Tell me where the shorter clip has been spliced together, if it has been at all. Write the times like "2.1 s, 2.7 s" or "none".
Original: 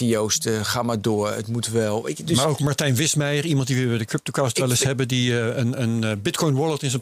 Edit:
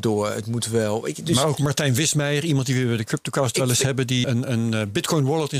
4.2 s